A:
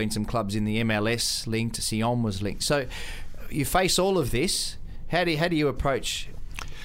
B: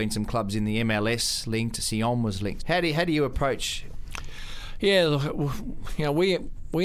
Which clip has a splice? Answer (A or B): B